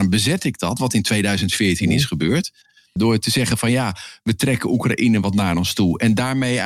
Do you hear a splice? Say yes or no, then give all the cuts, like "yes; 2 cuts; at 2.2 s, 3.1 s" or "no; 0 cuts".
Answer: yes; 1 cut; at 3.0 s